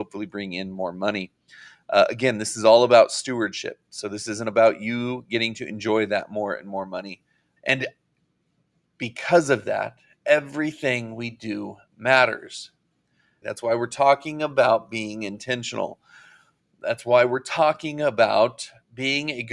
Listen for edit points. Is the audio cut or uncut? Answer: cut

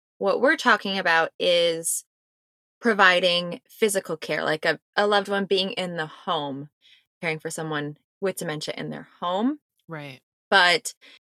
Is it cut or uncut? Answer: uncut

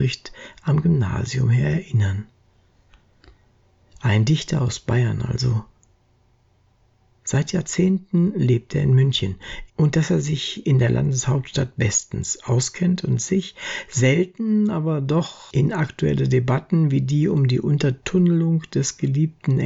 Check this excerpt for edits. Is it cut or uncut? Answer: cut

